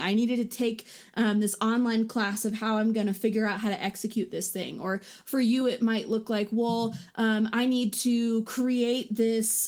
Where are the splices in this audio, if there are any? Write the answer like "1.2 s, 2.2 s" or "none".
none